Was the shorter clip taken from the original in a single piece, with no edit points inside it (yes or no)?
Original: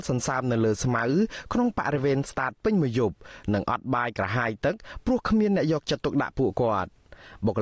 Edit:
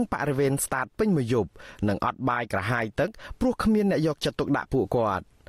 yes